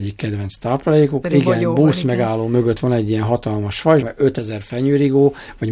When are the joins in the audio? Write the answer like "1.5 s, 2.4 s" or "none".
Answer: 1.2 s, 4.0 s

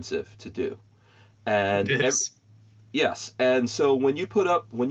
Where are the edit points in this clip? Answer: none

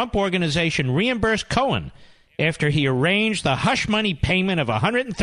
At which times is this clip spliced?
none

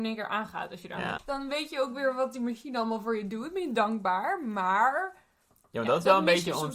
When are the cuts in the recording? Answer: 1.2 s

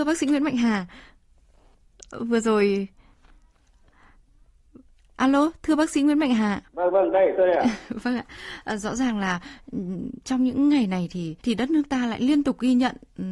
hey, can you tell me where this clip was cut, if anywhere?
6.7 s, 11.4 s

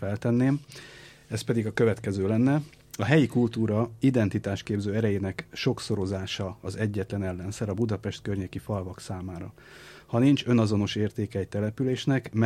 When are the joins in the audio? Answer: none

